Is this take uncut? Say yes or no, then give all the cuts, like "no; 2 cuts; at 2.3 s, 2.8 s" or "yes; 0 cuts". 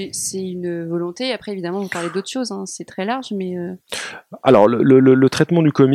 yes; 0 cuts